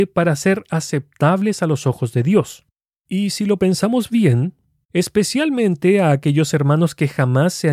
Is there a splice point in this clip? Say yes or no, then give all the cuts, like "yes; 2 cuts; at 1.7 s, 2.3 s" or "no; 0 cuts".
yes; 1 cut; at 4.8 s